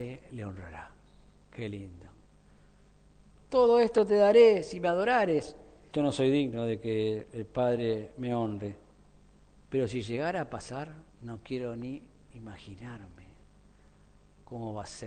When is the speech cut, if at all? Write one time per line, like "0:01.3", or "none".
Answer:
0:03.3
0:05.9
0:11.1